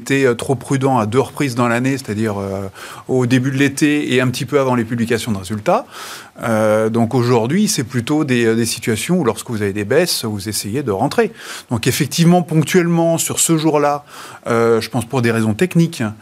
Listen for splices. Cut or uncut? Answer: uncut